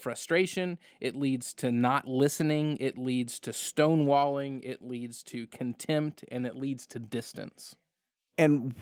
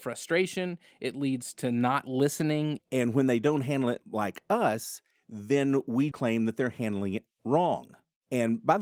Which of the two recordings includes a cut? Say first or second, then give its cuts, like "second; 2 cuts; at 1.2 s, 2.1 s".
second; 2 cuts; at 2.8 s, 6.1 s